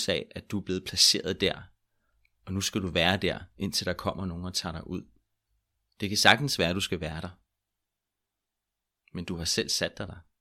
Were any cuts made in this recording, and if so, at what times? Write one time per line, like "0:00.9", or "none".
none